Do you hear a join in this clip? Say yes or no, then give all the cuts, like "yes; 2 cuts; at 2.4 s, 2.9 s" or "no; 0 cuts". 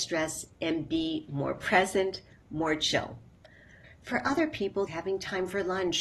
yes; 2 cuts; at 3.8 s, 4.9 s